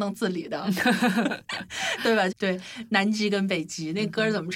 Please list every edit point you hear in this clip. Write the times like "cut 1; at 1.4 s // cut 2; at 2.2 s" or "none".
cut 1; at 2.3 s

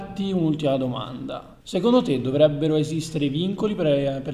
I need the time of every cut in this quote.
cut 1; at 1.6 s

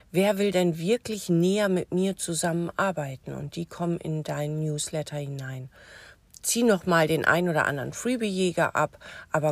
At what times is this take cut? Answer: none

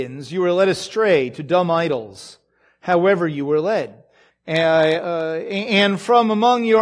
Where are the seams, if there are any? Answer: cut 1; at 4.3 s

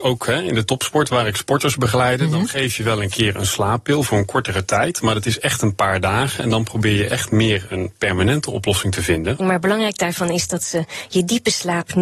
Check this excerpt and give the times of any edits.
cut 1; at 7.7 s // cut 2; at 9.4 s

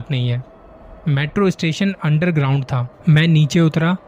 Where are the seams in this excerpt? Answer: cut 1; at 3.0 s

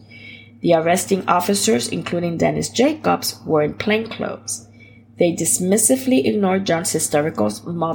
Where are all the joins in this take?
none

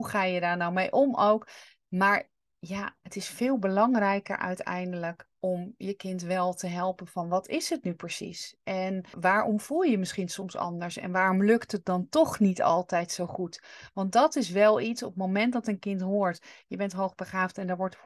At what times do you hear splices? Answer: cut 1; at 9.1 s

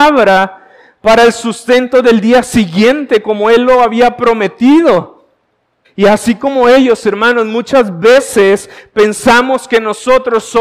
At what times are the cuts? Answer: cut 1; at 5.8 s

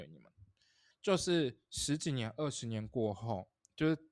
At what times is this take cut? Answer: cut 1; at 0.9 s

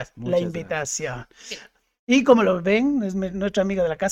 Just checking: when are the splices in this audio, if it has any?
none

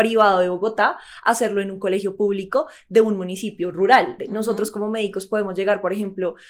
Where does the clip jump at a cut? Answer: cut 1; at 4.2 s

